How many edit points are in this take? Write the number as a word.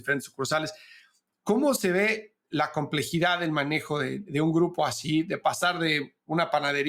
zero